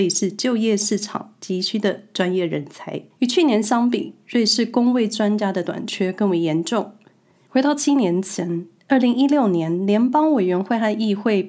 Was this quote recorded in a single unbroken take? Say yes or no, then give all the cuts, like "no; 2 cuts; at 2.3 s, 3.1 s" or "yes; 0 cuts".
yes; 0 cuts